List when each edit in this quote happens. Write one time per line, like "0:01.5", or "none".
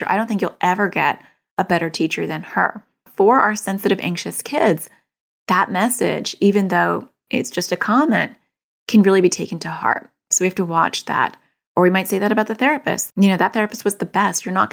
0:13.1